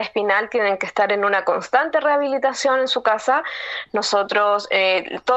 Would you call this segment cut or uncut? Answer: uncut